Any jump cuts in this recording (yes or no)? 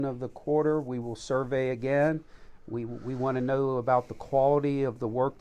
no